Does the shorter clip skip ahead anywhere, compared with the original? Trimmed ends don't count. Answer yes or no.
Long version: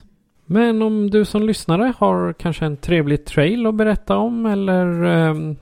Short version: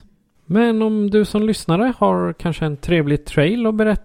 no